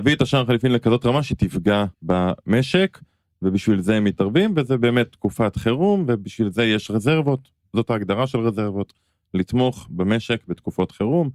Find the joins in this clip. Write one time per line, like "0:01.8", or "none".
0:01.9